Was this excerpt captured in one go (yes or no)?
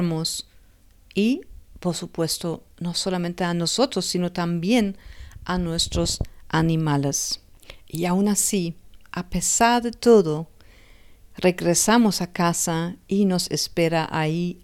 yes